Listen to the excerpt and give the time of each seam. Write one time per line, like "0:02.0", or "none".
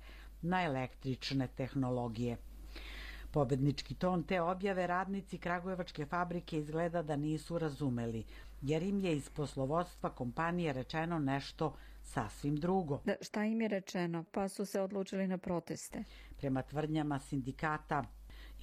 none